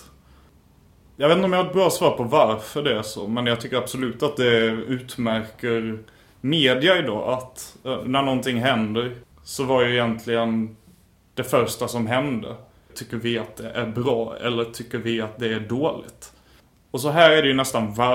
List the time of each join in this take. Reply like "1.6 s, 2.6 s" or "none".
9.3 s, 12.9 s